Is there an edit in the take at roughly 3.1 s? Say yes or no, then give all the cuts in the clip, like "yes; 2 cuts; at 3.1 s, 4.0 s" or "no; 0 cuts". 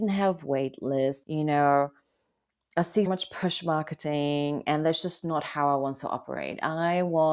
yes; 2 cuts; at 1.2 s, 3.1 s